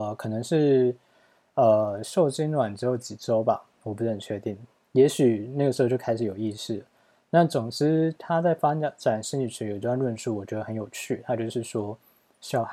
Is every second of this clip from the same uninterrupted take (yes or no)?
yes